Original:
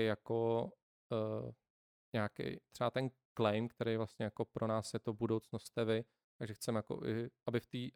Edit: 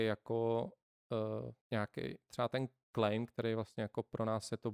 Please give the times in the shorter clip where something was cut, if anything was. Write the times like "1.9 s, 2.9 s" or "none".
1.6 s